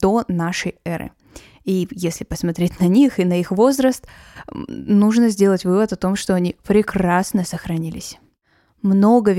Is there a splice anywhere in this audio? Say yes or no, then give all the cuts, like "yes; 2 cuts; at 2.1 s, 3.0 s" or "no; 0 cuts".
no; 0 cuts